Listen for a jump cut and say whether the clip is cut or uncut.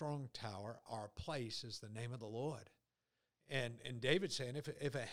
uncut